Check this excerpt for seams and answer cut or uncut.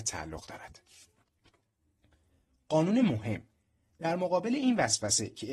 uncut